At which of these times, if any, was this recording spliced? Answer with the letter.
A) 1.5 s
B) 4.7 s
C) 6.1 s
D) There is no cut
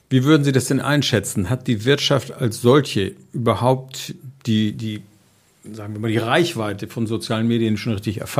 D